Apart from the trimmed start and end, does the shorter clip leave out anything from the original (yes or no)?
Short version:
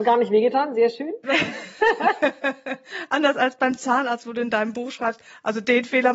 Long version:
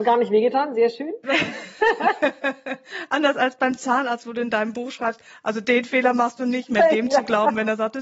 no